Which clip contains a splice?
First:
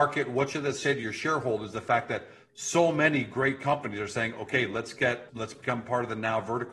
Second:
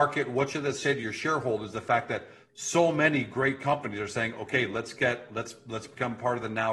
first; 1 cut; at 5.3 s

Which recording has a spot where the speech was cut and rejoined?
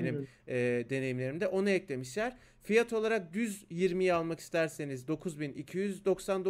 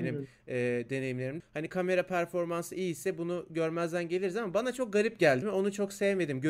second; 2 cuts; at 1.4 s, 5.4 s

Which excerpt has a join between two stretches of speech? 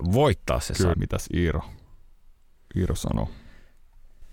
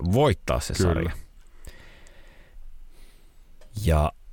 first; 1 cut; at 0.9 s

